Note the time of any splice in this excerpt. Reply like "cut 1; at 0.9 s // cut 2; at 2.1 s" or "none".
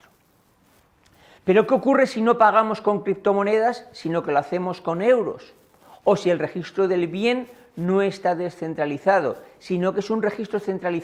cut 1; at 1.4 s